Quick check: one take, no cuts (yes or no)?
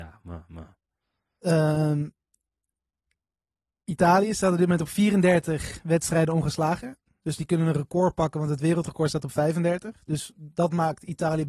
yes